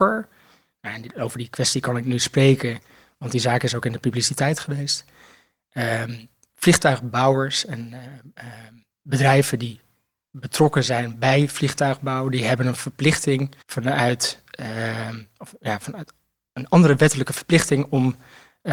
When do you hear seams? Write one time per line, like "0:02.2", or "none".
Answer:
0:13.6